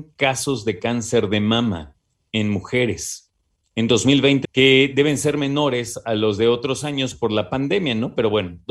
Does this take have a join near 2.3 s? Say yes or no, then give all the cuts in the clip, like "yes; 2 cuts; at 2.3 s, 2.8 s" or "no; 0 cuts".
no; 1 cut; at 4.4 s